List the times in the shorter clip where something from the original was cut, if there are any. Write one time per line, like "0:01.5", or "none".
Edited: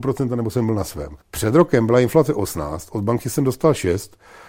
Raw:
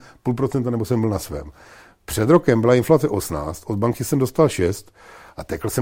0:01.2